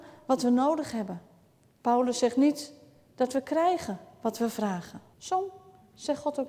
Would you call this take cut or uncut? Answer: cut